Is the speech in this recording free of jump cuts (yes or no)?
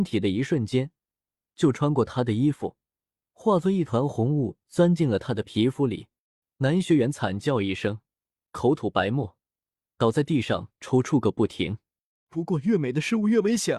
no